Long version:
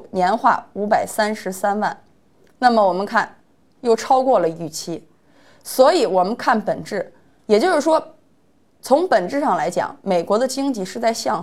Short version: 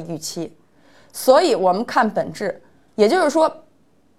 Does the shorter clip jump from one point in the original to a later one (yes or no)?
no